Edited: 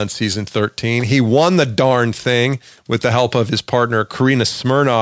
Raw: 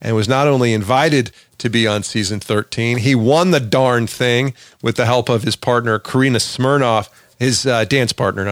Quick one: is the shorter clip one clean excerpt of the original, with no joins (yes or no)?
yes